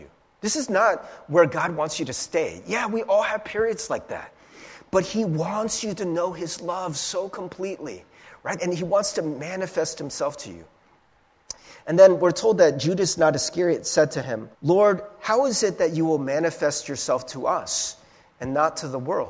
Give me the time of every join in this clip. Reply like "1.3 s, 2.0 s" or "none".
8.6 s, 14.5 s